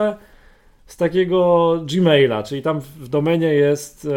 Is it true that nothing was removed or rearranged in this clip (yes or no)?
yes